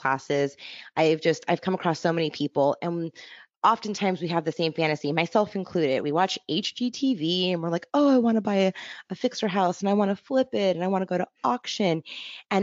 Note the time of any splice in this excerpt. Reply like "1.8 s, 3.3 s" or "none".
none